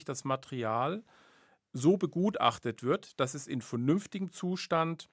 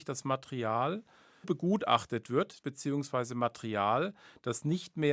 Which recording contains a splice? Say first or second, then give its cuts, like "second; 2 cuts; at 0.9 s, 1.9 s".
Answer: second; 2 cuts; at 1.4 s, 2.6 s